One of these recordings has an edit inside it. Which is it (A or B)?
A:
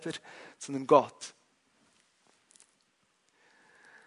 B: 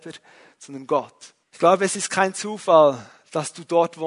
B